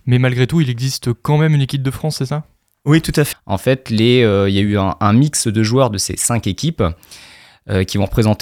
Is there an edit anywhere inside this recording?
yes; 1 cut; at 3.3 s

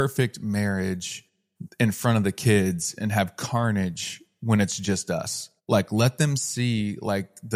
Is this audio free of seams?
no; 1 cut; at 5.6 s

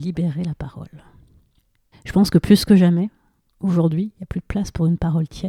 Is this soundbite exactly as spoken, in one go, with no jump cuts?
no; 1 cut; at 1.9 s

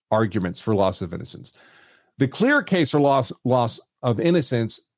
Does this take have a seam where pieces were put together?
no; 0 cuts

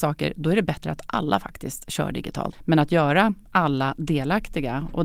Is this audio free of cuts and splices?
no; 1 cut; at 2.5 s

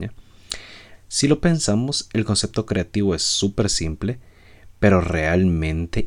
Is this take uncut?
no; 1 cut; at 1.0 s

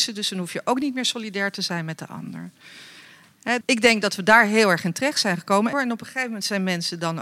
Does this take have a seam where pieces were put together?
yes; 2 cuts; at 3.6 s, 5.7 s

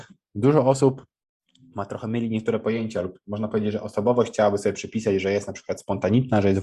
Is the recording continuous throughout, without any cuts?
yes; 0 cuts

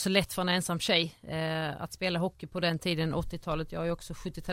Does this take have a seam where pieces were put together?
no; 0 cuts

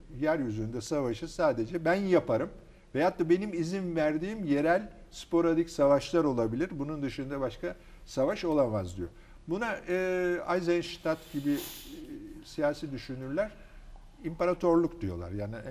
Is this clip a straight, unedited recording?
yes; 0 cuts

